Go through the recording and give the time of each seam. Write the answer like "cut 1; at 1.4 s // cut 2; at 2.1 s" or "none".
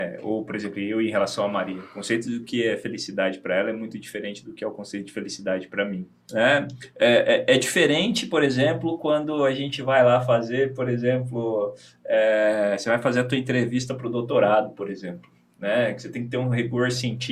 cut 1; at 6.2 s